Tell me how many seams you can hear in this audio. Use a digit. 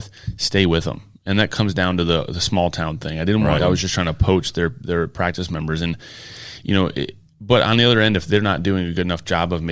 1